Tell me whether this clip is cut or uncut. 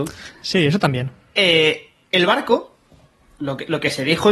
uncut